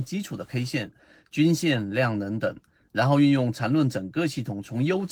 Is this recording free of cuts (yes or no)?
yes